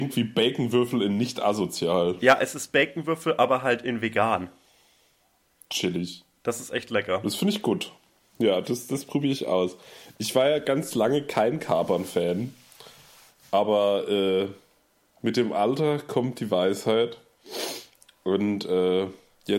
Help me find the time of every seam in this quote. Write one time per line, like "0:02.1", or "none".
none